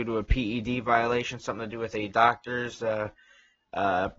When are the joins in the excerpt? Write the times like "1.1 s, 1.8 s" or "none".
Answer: none